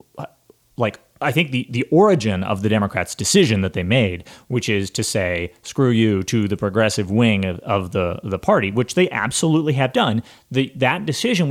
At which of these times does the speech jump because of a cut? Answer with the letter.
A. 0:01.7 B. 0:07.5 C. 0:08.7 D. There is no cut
D